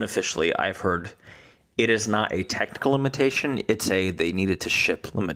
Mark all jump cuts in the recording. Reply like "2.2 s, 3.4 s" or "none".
none